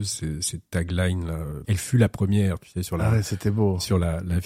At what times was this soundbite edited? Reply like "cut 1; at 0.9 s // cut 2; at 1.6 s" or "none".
cut 1; at 1.6 s